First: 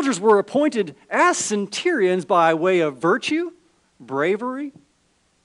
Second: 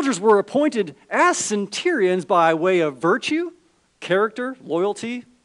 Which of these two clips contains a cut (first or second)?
second